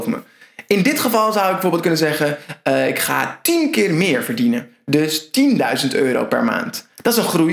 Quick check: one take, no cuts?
yes; 0 cuts

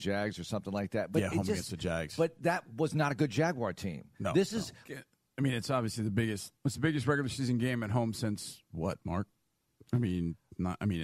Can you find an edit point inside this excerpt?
yes; 2 cuts; at 4.9 s, 6.6 s

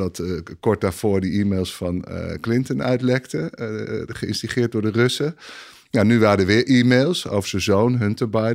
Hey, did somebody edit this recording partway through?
no; 0 cuts

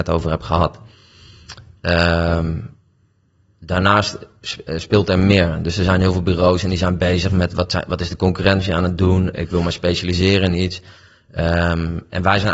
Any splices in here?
no; 0 cuts

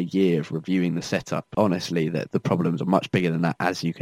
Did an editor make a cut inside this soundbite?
yes; 1 cut; at 2.3 s

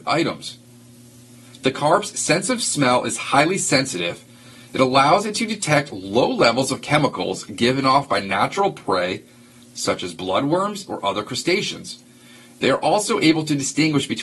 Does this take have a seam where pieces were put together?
yes; 1 cut; at 10.9 s

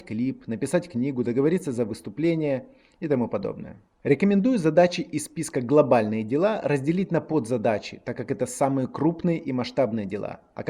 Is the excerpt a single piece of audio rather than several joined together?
yes; 0 cuts

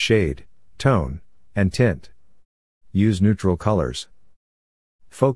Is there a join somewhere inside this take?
yes; 1 cut; at 2.8 s

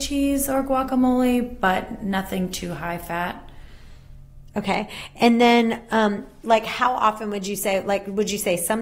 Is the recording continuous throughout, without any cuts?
yes; 0 cuts

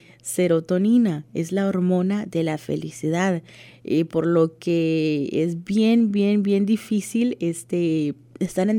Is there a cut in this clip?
no; 0 cuts

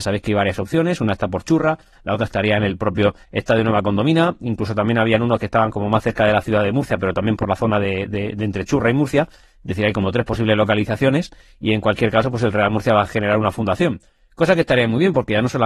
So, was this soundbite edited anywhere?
no; 0 cuts

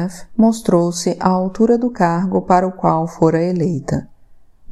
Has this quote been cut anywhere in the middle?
no; 0 cuts

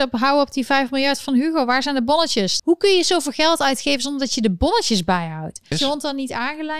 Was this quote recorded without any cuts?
no; 2 cuts; at 2.6 s, 5.7 s

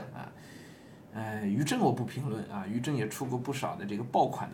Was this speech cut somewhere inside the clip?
no; 0 cuts

